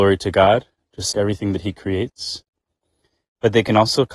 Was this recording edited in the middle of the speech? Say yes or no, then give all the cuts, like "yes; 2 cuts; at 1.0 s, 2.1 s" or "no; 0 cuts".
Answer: yes; 1 cut; at 1.1 s